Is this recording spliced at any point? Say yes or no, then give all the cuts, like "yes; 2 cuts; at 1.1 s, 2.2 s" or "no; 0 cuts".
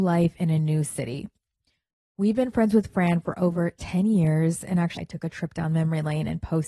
yes; 1 cut; at 5.0 s